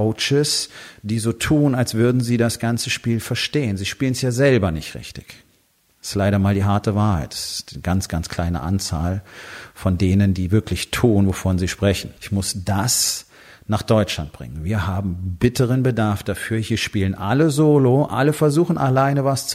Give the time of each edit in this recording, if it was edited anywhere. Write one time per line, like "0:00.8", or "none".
0:12.2